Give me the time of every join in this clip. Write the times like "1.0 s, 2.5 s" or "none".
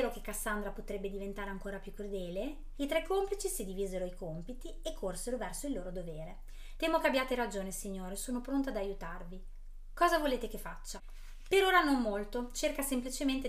2.7 s, 6.8 s